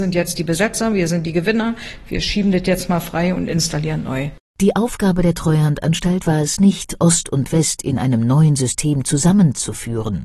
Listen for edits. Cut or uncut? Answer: uncut